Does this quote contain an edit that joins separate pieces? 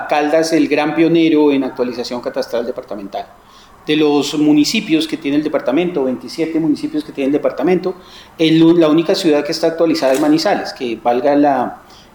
no; 0 cuts

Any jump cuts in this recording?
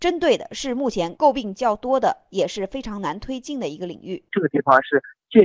no; 0 cuts

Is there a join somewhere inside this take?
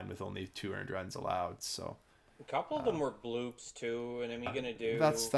yes; 1 cut; at 4.5 s

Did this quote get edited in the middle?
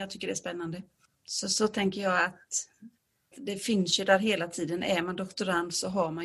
yes; 1 cut; at 3.3 s

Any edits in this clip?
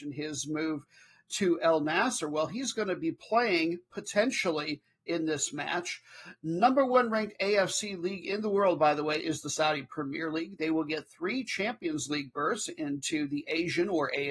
no; 0 cuts

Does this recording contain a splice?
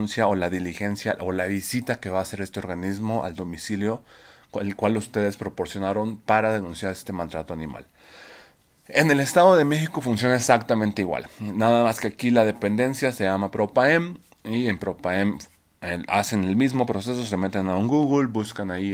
no; 0 cuts

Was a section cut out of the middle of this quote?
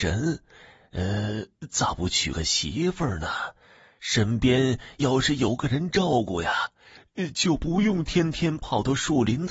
no; 0 cuts

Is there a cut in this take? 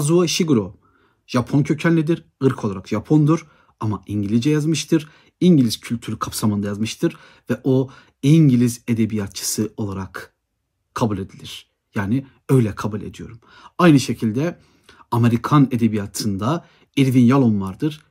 no; 0 cuts

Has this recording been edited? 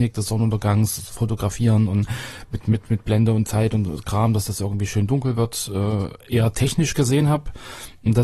no; 0 cuts

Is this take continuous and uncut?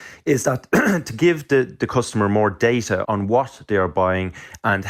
no; 1 cut; at 3.0 s

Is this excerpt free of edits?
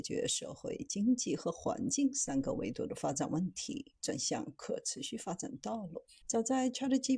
no; 1 cut; at 6.2 s

